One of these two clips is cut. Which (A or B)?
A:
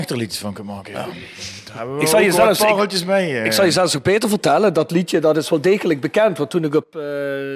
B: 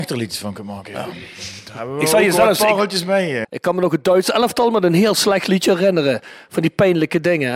B